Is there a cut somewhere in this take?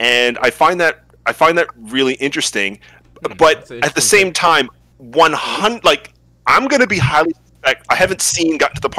no; 0 cuts

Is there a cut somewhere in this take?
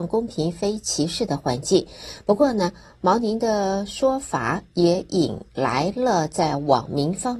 no; 0 cuts

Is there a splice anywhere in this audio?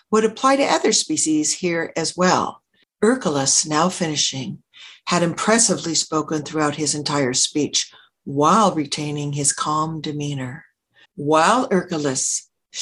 yes; 2 cuts; at 2.8 s, 11.0 s

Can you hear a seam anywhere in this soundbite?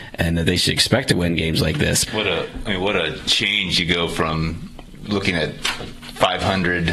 yes; 1 cut; at 2.1 s

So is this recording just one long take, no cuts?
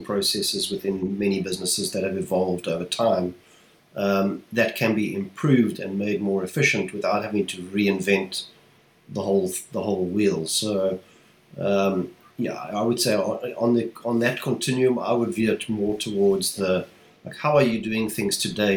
yes; 0 cuts

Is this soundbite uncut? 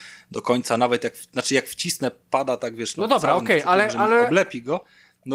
yes; 0 cuts

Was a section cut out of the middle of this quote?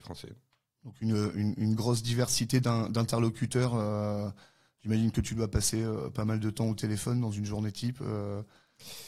no; 0 cuts

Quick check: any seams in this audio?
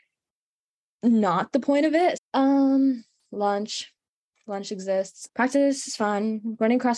yes; 2 cuts; at 2.2 s, 5.3 s

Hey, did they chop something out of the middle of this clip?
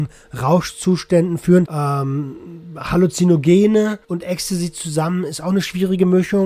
yes; 2 cuts; at 1.6 s, 4.0 s

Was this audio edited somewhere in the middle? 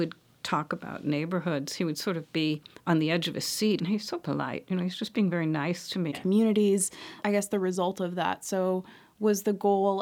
yes; 3 cuts; at 3.8 s, 6.1 s, 7.2 s

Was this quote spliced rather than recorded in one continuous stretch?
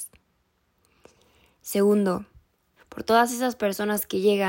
yes; 1 cut; at 2.8 s

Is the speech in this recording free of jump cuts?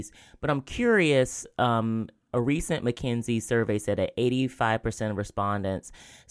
yes; 0 cuts

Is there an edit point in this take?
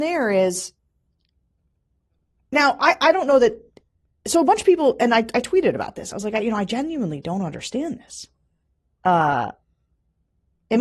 no; 0 cuts

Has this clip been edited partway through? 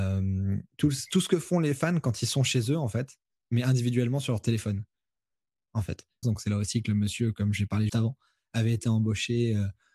yes; 2 cuts; at 6.2 s, 7.9 s

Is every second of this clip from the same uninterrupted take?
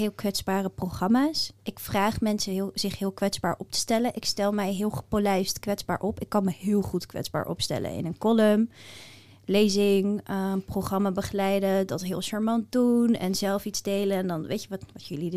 yes; 0 cuts

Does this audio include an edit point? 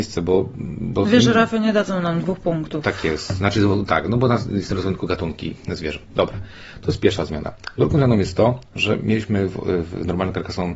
no; 0 cuts

